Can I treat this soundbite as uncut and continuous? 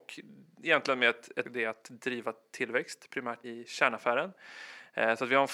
no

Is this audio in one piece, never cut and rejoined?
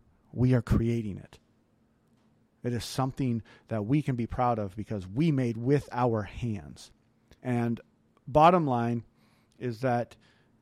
no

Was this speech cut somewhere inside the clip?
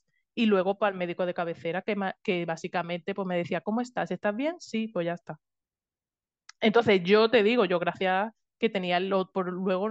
no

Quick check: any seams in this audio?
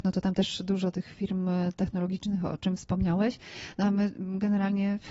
no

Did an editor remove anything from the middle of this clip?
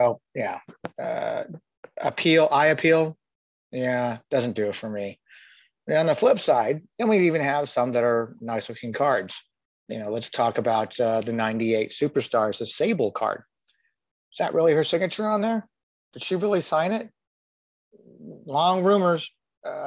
no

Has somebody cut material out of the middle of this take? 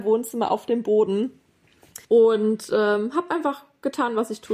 yes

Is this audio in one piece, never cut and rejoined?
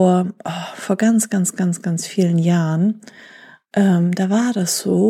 yes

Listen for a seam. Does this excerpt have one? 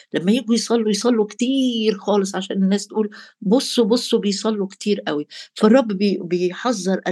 no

